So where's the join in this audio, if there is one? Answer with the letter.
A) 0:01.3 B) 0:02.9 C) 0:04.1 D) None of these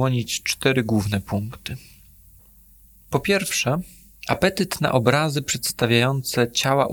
C